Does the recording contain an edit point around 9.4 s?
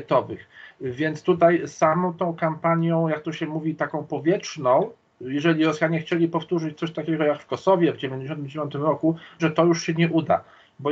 yes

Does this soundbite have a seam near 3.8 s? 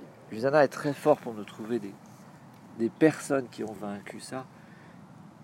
yes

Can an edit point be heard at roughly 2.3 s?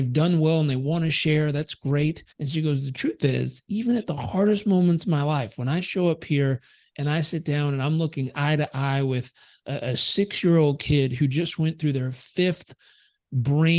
yes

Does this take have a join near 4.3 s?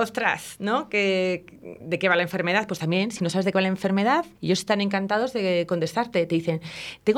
yes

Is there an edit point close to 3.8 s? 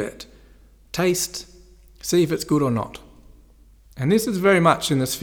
yes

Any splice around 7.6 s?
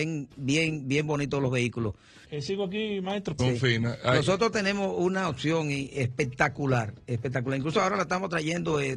no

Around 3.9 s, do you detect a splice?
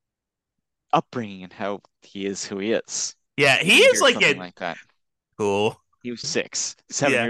no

